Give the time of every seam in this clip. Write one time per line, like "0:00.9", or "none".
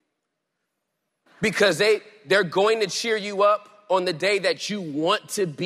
0:01.3